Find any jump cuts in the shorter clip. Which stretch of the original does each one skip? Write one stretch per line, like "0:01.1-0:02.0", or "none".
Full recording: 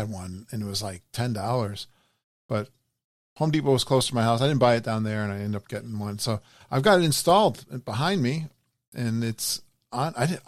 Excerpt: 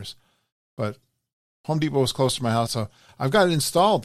0:04.4-0:06.2